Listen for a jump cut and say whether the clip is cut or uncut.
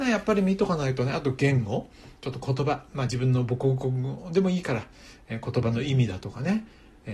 uncut